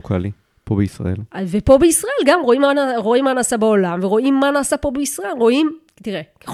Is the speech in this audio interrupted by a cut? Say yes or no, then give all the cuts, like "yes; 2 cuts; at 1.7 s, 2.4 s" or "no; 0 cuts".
no; 0 cuts